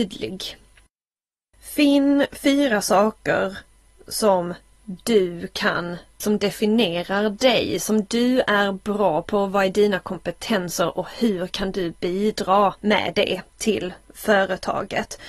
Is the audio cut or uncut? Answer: cut